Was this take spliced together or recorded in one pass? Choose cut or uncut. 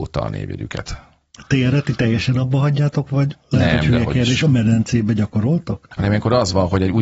uncut